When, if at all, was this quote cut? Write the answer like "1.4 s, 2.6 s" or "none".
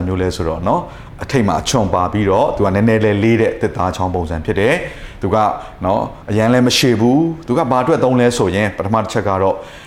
none

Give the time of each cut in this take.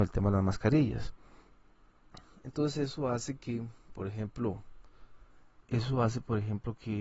5.6 s

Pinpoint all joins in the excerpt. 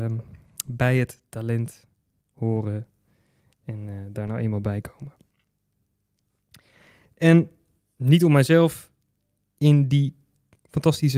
none

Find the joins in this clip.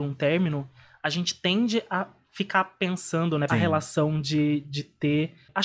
3.5 s

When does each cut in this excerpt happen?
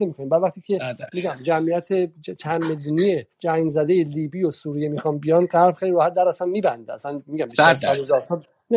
3.3 s

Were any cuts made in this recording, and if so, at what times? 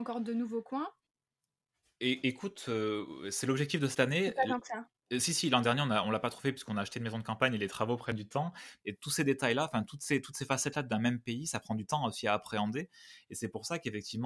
8.8 s

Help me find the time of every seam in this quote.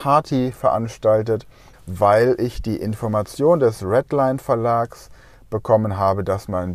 1.7 s

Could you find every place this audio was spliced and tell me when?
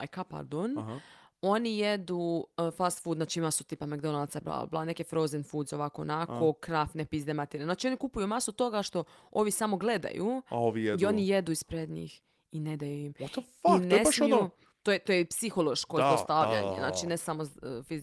4.4 s

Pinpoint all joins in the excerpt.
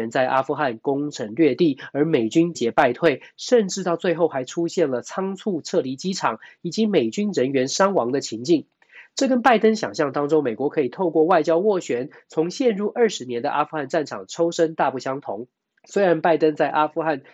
2.5 s

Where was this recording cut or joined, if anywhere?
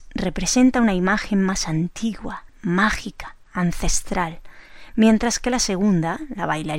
none

